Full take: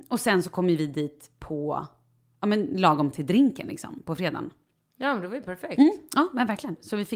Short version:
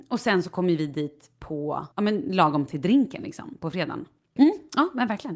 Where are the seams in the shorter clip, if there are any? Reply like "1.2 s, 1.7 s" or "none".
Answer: 1.9 s, 4.4 s